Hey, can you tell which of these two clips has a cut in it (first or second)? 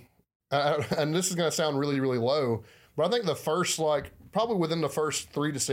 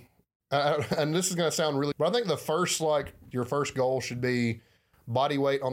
second